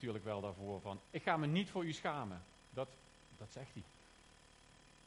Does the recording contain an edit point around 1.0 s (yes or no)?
yes